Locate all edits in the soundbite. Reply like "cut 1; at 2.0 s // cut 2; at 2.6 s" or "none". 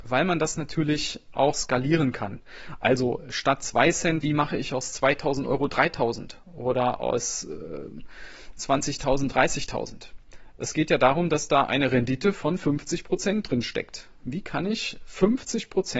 cut 1; at 4.2 s